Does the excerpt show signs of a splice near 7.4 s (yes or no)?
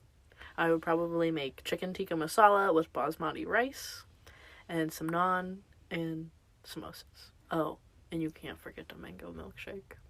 yes